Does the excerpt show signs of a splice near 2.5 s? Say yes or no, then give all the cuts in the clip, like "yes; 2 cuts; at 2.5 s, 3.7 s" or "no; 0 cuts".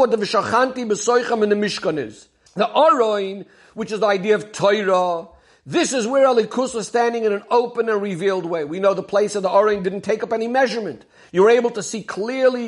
yes; 1 cut; at 2.5 s